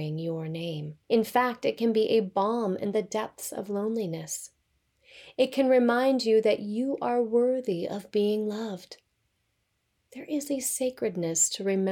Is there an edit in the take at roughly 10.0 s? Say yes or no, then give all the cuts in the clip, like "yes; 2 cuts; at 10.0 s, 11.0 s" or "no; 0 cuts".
no; 1 cut; at 1.0 s